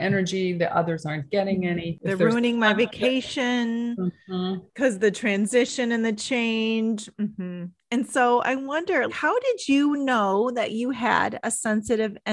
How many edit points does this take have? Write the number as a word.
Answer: two